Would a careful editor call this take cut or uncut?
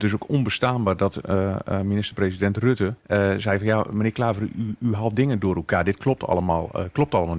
cut